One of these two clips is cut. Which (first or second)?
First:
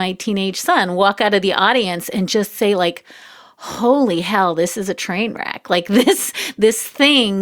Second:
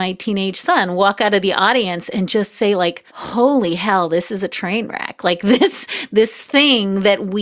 second